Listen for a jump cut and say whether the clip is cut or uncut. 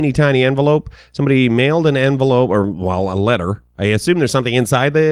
uncut